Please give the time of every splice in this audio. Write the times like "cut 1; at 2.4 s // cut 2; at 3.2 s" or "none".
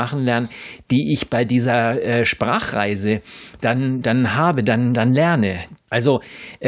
cut 1; at 5.8 s